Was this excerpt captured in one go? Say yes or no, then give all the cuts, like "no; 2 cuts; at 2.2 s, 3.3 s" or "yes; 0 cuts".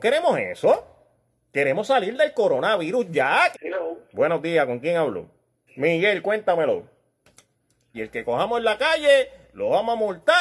no; 3 cuts; at 3.5 s, 5.7 s, 7.9 s